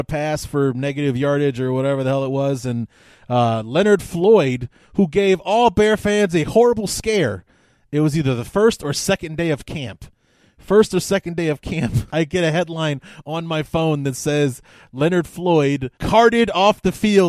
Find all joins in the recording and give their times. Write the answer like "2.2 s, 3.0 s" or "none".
12.1 s, 15.9 s